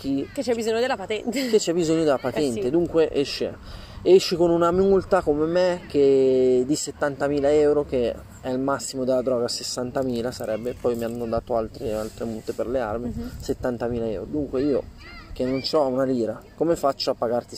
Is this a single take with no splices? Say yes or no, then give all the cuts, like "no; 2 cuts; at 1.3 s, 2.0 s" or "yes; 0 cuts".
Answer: yes; 0 cuts